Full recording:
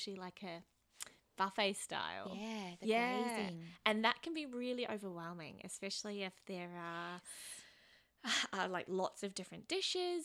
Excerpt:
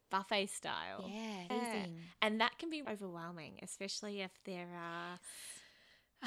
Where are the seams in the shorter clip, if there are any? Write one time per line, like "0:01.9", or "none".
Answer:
0:01.5
0:02.9